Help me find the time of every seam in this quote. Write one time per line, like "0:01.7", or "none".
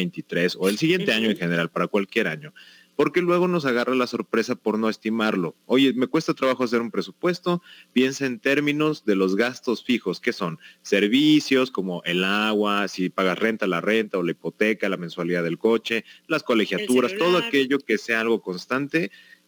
none